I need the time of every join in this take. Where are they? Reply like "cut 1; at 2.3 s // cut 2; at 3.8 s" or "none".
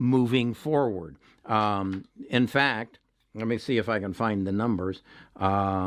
none

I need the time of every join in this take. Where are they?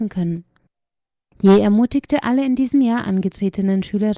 cut 1; at 1.3 s

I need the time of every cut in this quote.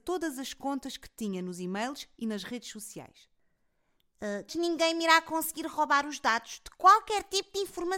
cut 1; at 4.5 s

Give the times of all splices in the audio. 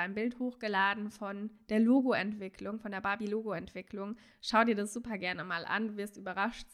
none

